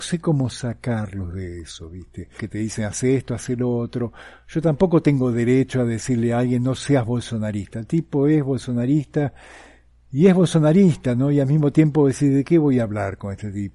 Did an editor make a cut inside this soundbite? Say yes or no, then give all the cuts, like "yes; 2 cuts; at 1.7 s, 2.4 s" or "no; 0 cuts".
yes; 1 cut; at 2.4 s